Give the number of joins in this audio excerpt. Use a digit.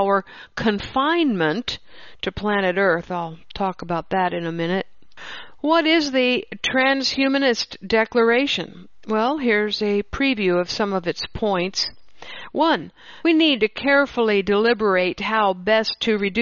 1